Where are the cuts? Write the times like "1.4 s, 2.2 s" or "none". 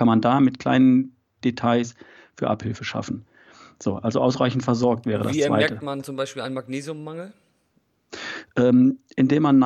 none